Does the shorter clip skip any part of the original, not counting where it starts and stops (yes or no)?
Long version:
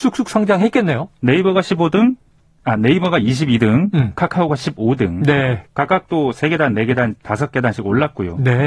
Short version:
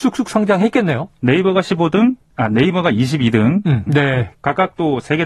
yes